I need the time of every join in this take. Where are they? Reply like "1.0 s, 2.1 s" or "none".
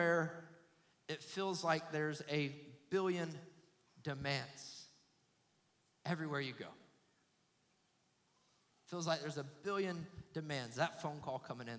none